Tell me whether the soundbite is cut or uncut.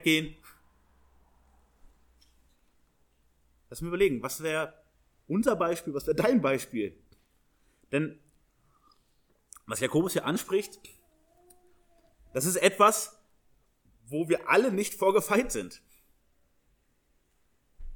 uncut